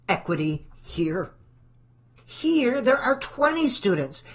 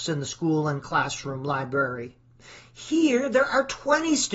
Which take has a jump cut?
first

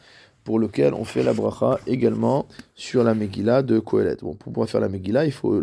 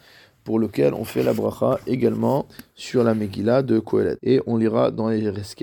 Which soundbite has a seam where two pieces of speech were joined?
second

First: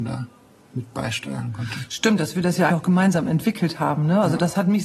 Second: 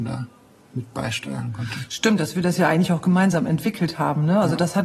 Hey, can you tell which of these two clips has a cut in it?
first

